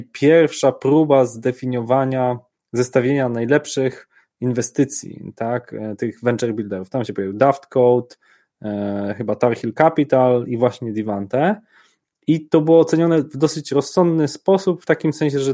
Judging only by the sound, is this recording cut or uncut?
uncut